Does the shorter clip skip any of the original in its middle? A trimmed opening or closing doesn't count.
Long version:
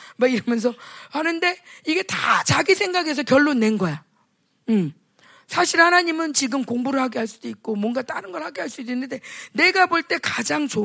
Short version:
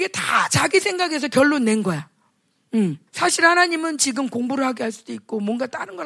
yes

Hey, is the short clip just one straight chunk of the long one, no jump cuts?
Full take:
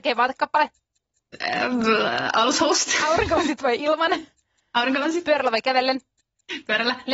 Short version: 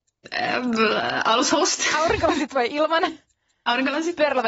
yes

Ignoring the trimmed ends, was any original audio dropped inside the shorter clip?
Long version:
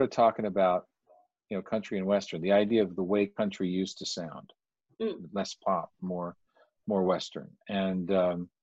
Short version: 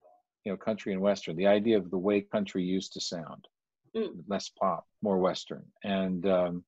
yes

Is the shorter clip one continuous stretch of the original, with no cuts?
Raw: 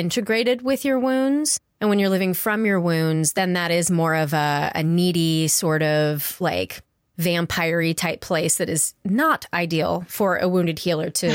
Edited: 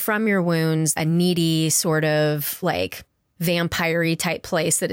no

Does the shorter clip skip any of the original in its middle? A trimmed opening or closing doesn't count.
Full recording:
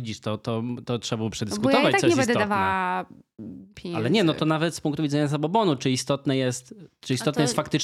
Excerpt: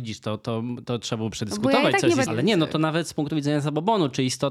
yes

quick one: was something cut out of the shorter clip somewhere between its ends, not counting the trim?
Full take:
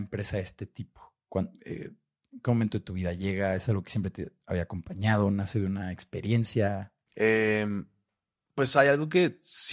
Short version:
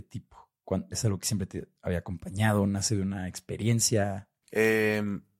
yes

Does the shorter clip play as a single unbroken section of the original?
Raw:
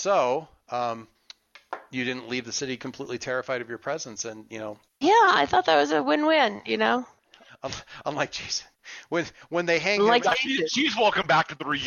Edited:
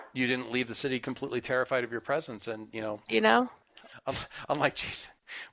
no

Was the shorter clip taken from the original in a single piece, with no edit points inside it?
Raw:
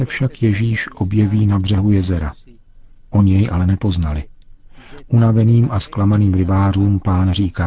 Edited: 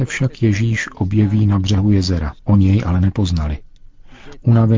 no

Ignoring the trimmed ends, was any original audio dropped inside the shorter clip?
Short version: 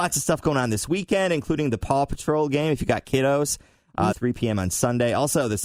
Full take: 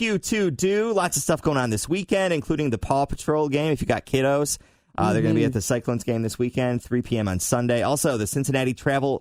yes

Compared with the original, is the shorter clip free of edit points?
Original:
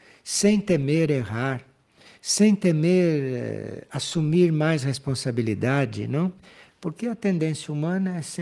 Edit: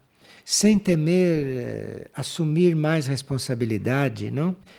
yes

